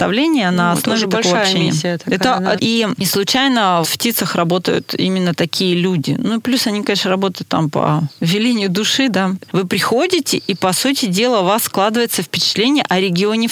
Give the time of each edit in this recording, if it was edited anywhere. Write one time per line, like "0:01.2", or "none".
0:02.6
0:03.8
0:09.5

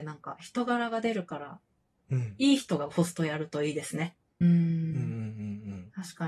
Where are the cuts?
0:04.4

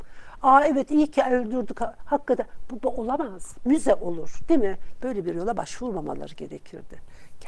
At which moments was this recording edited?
0:03.6
0:05.0

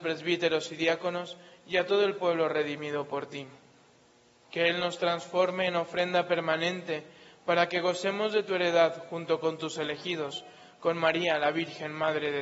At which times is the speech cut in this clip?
0:04.4

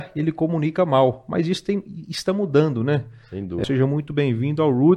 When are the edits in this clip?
0:03.6

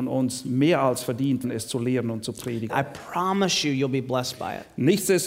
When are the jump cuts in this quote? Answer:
0:01.4
0:02.7

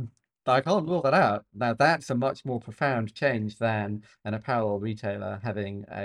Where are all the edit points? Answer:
none

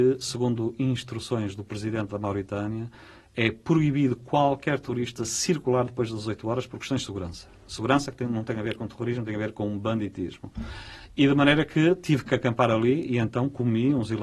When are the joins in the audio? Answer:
none

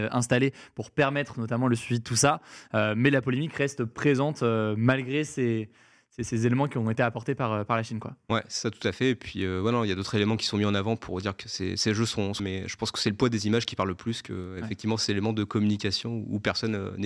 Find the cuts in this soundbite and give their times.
0:12.4

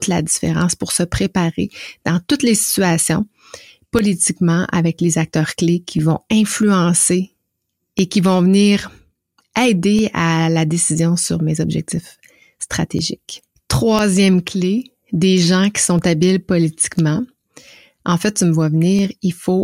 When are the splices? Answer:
none

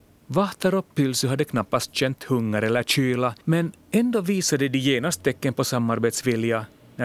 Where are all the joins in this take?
0:03.4

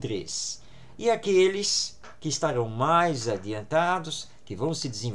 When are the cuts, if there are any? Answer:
none

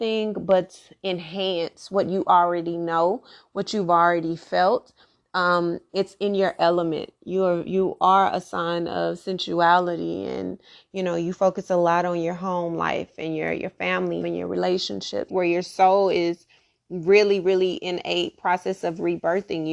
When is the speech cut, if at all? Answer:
0:14.2
0:15.3

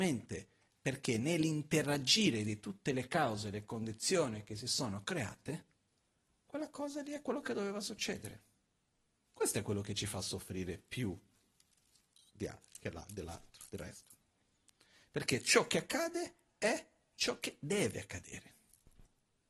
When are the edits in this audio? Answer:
0:09.2

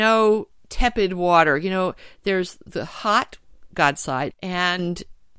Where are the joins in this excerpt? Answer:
0:04.3

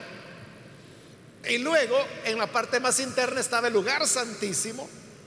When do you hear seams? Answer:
0:01.4

